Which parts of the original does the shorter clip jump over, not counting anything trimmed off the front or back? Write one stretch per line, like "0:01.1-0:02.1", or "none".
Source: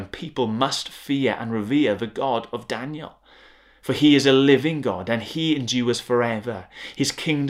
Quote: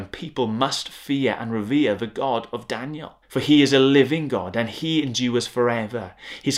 0:03.2-0:03.8